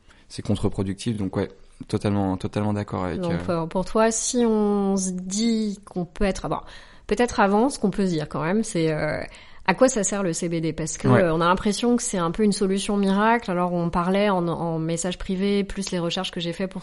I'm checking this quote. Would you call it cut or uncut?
uncut